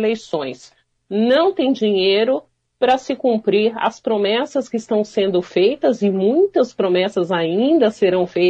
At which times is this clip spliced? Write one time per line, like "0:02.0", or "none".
0:01.0